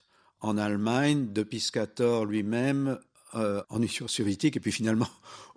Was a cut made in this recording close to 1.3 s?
no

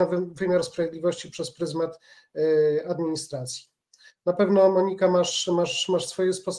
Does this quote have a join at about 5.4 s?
no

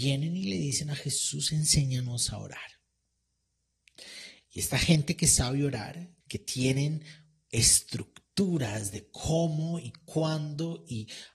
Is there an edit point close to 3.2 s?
no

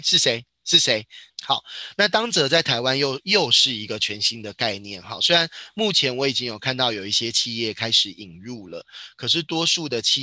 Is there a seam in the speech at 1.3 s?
yes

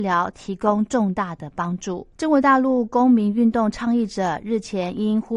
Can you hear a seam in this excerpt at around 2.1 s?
yes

